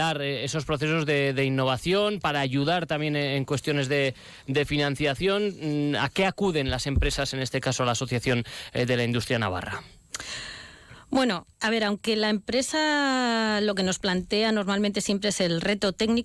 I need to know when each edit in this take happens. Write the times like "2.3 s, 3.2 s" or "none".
11.5 s